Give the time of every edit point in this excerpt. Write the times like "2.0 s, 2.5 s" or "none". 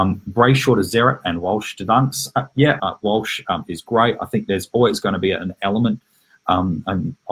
2.8 s